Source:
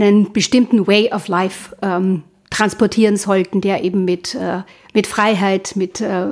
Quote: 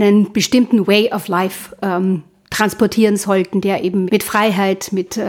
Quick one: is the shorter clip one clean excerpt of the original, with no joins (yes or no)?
no